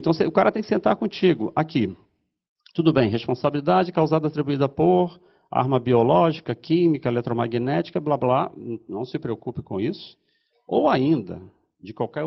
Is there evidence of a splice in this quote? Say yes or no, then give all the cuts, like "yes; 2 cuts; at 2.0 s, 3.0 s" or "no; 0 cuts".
no; 0 cuts